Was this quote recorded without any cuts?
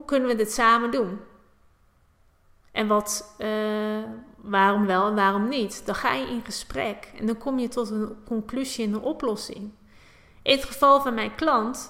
yes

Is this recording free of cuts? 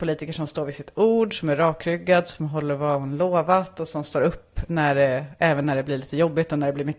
no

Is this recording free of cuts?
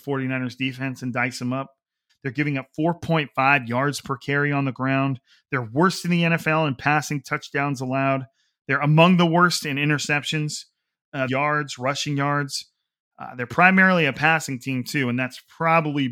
no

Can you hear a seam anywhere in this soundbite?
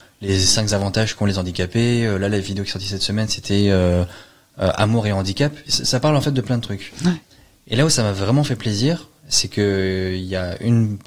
yes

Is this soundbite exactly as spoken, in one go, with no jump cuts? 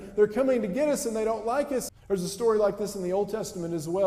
no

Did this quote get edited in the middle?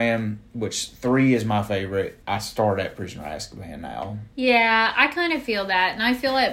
yes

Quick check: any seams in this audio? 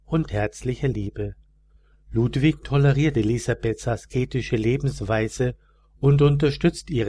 no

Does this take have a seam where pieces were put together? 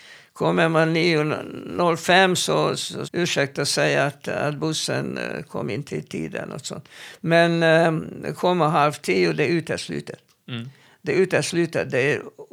yes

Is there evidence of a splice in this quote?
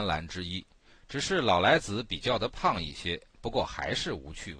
yes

